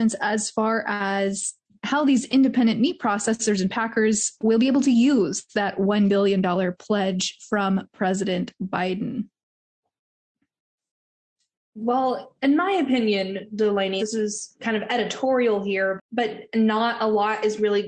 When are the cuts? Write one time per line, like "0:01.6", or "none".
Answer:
0:14.0
0:16.0